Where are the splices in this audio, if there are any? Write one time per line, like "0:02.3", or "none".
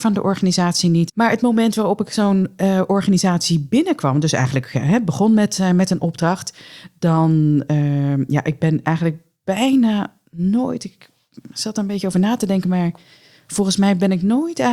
0:01.1